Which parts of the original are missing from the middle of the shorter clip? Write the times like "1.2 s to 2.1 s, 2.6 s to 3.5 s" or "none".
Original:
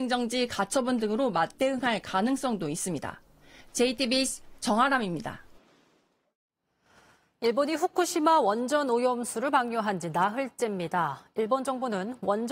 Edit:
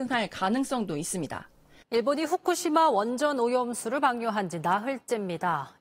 3.5 s to 7.3 s